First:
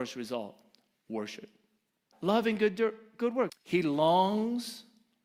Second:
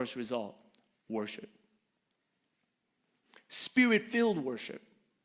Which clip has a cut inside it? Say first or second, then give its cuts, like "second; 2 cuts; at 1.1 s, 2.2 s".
first; 2 cuts; at 2.1 s, 3.5 s